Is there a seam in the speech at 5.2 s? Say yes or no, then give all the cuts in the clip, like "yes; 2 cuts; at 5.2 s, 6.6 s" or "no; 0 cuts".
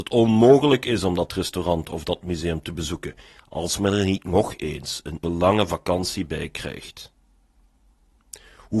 yes; 1 cut; at 5.2 s